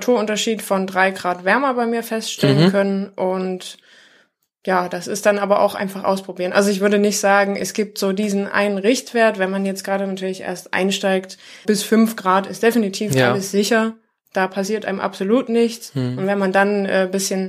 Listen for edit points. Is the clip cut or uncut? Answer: cut